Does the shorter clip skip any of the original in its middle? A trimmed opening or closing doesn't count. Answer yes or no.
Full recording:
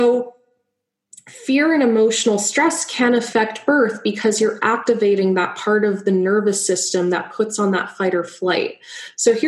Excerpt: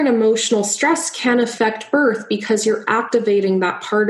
no